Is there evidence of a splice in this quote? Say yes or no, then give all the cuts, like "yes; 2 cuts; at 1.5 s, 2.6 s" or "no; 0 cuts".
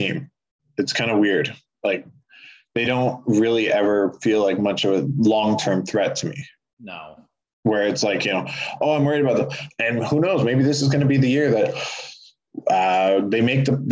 yes; 1 cut; at 9.7 s